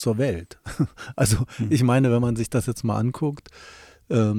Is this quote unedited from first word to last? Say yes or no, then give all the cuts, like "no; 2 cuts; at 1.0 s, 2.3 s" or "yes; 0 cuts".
yes; 0 cuts